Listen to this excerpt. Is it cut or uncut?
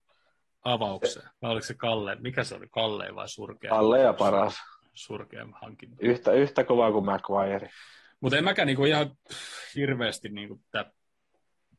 cut